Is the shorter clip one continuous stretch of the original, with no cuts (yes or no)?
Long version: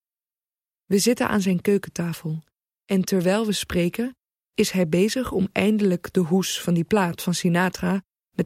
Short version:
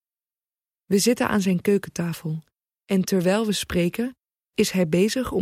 yes